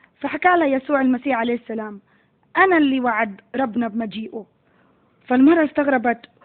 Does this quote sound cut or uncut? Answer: uncut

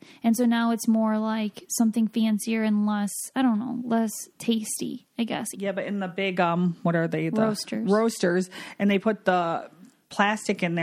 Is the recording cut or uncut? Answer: cut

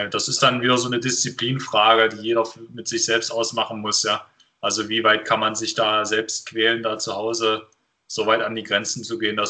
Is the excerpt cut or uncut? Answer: uncut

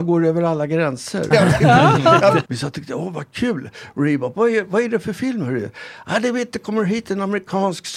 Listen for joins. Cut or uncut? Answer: cut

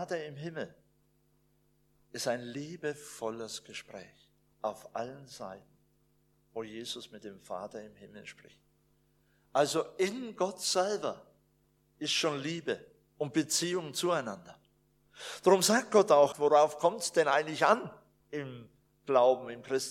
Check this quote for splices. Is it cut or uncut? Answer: cut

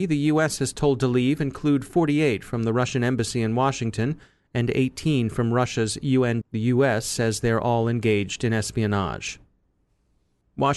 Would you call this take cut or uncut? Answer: cut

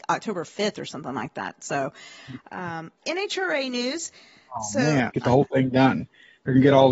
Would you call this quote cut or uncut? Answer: cut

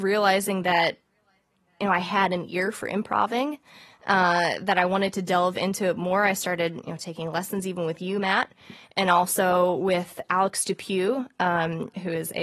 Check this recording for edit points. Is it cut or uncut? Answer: uncut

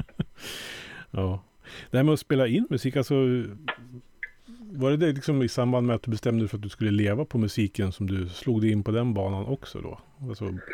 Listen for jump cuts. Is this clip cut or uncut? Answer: uncut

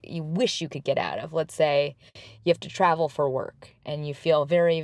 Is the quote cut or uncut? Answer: uncut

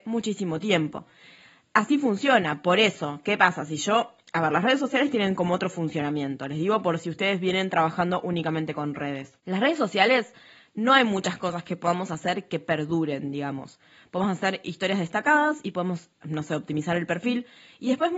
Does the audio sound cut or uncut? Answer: uncut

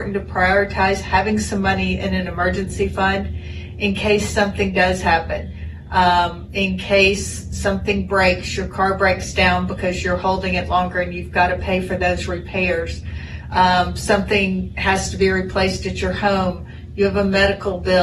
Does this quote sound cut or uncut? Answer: uncut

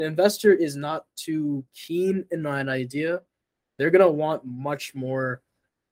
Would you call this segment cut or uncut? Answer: uncut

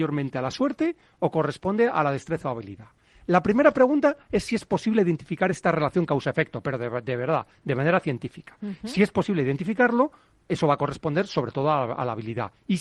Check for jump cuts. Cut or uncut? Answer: uncut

